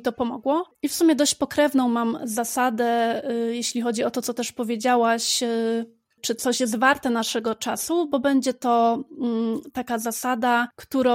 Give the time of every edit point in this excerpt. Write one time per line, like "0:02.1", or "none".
none